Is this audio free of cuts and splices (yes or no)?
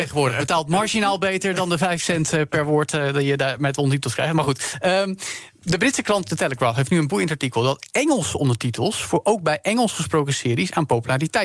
yes